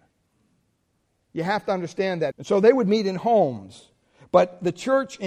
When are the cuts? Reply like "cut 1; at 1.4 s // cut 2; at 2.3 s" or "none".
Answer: cut 1; at 2.3 s